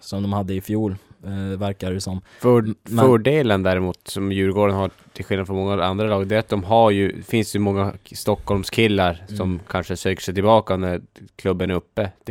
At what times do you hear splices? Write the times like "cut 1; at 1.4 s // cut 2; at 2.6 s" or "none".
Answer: none